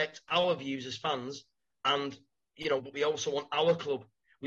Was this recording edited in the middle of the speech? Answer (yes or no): yes